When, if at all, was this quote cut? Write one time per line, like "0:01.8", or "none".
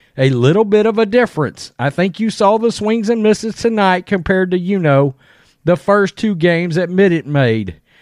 none